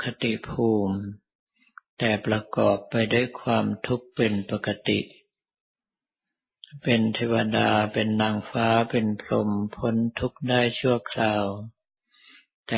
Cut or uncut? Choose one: uncut